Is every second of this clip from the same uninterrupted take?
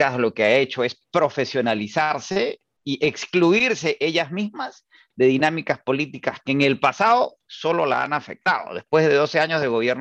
yes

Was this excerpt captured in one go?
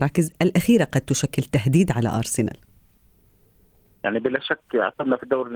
yes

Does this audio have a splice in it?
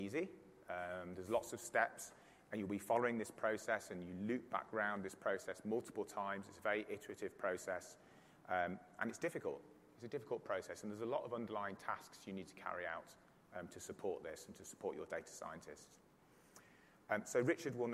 no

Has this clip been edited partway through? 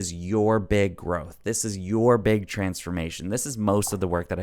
no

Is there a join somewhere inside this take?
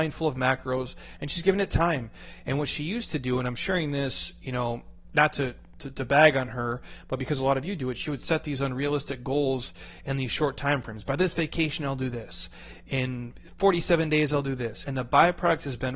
yes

